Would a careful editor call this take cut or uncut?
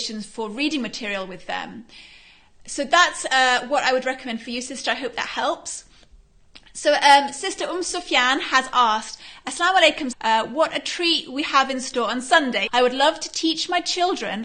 cut